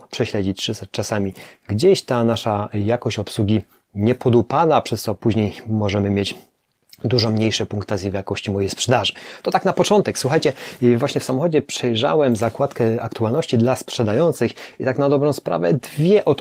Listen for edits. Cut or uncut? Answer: uncut